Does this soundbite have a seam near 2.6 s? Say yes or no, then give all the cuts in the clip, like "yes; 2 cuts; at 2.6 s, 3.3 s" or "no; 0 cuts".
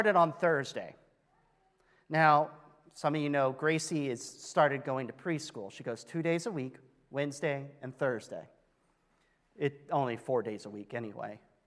no; 0 cuts